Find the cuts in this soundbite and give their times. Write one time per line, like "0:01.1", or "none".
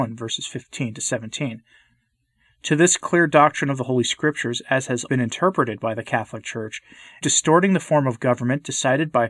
0:05.1
0:07.2